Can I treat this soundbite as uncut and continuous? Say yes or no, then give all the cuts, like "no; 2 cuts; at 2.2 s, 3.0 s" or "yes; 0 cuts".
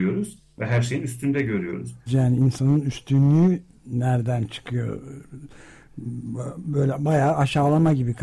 no; 1 cut; at 2.1 s